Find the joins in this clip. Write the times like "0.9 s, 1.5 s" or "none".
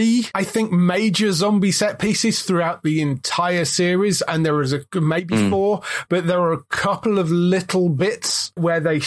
none